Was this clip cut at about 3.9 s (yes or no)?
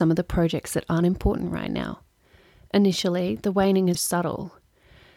yes